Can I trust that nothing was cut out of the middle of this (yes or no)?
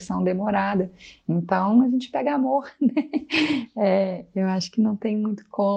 yes